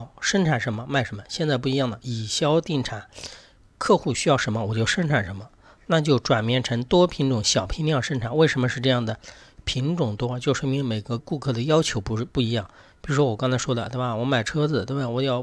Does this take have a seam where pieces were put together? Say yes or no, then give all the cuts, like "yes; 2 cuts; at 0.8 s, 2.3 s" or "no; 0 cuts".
yes; 1 cut; at 11.2 s